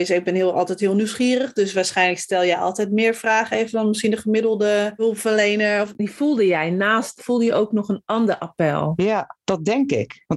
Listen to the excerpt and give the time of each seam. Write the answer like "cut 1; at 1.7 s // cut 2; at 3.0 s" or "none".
cut 1; at 5.9 s // cut 2; at 7.2 s